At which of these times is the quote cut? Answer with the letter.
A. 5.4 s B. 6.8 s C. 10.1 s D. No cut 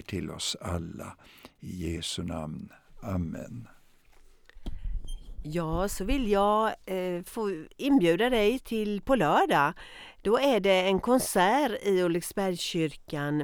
B